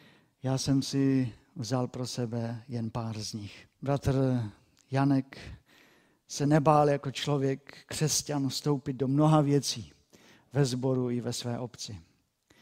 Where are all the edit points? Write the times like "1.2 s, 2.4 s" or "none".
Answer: 3.7 s